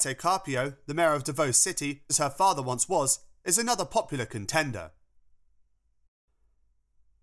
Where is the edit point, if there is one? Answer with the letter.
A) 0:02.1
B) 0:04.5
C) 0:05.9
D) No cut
A